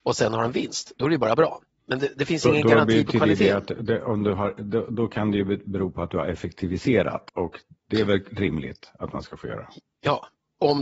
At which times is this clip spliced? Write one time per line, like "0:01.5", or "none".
none

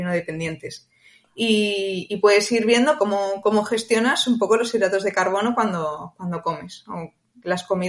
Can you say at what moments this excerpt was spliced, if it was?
0:03.0

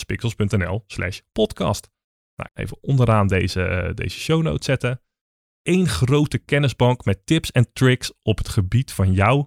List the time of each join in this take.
0:02.5
0:05.4

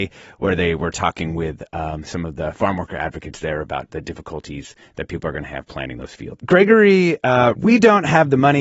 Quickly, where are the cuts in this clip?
0:06.4
0:07.5

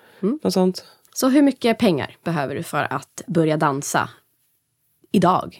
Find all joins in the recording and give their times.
0:01.1

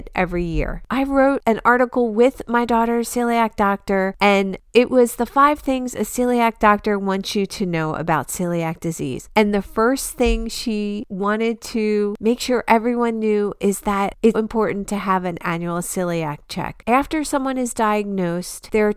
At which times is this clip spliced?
0:14.3

